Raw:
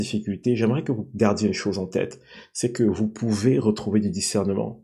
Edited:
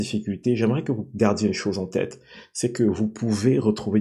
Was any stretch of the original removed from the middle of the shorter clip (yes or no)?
no